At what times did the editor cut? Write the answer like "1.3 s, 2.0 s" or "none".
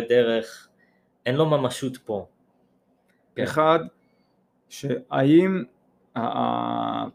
3.4 s